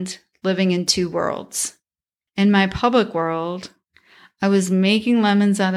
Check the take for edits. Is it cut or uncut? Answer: cut